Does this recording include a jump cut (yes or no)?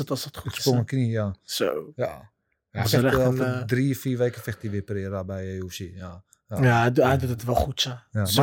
no